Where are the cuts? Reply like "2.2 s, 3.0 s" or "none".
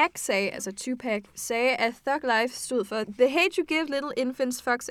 none